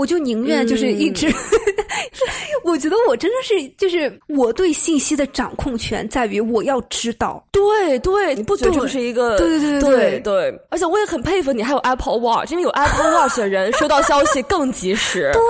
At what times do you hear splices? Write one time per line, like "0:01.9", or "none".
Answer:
0:08.4